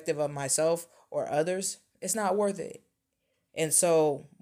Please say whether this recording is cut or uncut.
cut